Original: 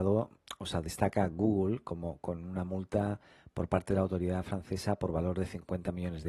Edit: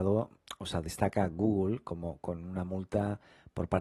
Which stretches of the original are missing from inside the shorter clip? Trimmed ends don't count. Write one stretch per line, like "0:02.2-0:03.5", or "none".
none

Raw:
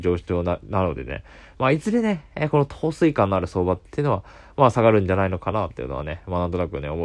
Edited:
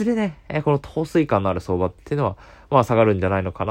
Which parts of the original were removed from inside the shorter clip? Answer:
none

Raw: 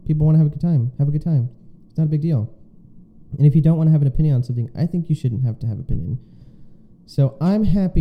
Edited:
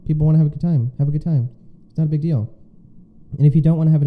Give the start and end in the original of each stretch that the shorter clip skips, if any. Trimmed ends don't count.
none

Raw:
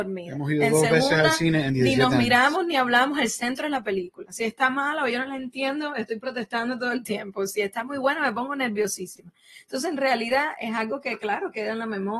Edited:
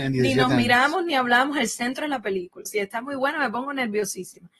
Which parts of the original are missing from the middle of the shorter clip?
0:04.3-0:07.5

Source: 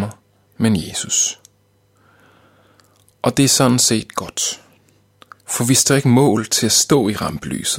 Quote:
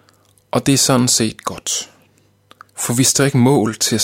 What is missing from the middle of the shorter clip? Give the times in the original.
none

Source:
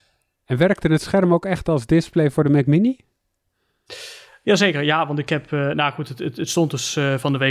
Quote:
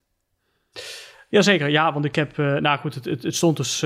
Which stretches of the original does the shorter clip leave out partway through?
none

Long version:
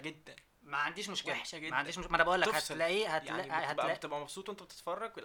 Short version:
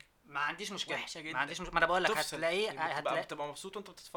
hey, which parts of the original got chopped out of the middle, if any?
0:03.1-0:03.4

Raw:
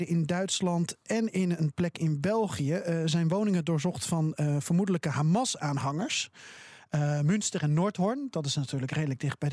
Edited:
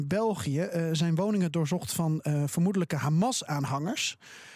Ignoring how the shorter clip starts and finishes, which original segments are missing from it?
none

